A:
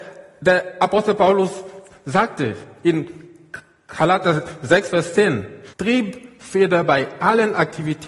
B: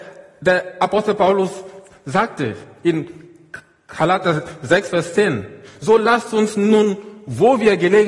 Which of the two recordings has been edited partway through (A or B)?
A